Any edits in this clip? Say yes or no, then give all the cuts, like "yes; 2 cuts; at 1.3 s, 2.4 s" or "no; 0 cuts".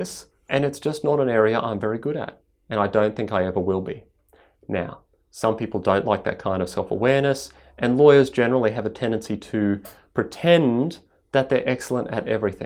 no; 0 cuts